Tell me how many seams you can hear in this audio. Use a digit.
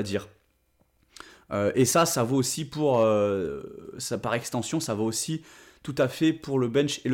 0